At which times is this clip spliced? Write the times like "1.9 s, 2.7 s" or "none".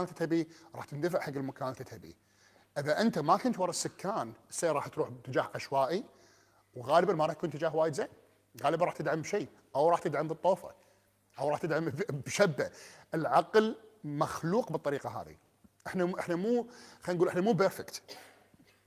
none